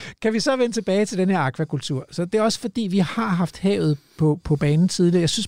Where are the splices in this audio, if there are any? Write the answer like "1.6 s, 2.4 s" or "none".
none